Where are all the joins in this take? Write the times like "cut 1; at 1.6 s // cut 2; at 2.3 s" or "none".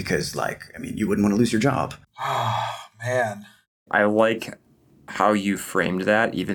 cut 1; at 2.1 s